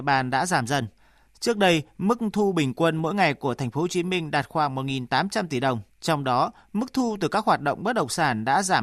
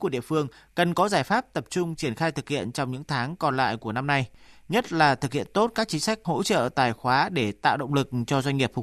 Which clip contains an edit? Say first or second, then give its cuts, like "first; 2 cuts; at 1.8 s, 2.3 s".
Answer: first; 1 cut; at 5.9 s